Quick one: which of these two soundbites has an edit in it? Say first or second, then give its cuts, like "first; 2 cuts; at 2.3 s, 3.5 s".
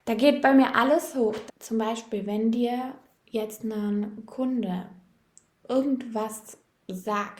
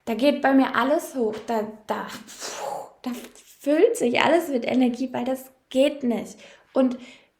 first; 1 cut; at 1.5 s